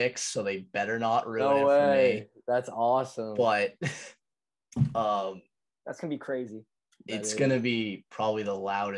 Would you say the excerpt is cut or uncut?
uncut